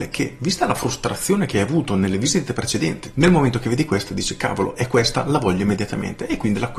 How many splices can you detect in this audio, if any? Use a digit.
1